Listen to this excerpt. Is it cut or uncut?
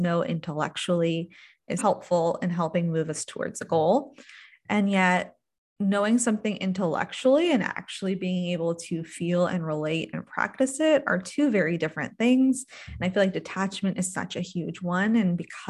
cut